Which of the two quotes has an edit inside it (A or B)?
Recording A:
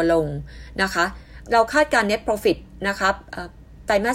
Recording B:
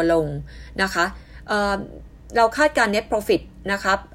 A